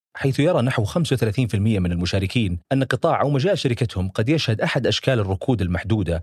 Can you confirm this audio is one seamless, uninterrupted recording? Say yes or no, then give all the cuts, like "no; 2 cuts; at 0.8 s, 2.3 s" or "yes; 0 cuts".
no; 1 cut; at 2.6 s